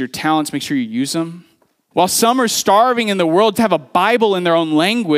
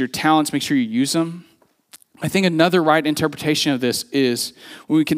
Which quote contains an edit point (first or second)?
first